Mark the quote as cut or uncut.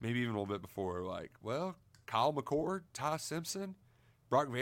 uncut